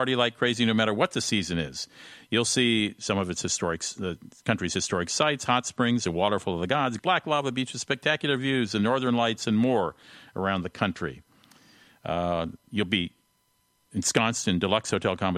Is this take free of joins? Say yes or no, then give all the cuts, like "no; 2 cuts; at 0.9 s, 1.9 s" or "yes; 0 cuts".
no; 1 cut; at 7.0 s